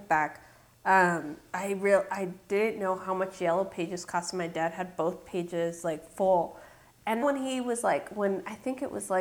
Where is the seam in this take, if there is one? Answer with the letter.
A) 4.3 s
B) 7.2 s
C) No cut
B